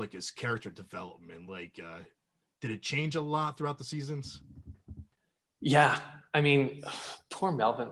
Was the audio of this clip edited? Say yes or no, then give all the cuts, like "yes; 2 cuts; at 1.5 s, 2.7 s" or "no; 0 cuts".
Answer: no; 0 cuts